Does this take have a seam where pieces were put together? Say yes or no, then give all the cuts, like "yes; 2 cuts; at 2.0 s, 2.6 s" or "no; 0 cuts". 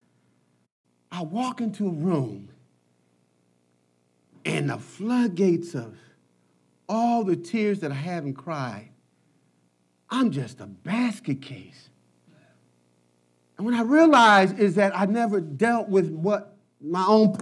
no; 0 cuts